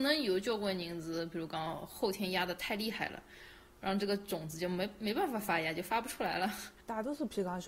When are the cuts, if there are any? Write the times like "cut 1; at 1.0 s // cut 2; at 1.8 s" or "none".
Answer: none